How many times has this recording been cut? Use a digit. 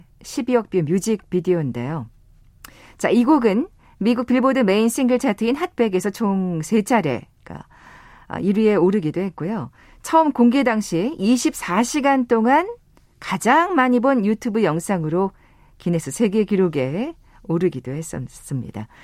0